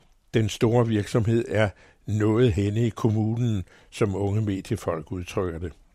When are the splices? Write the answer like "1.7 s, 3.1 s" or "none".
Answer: none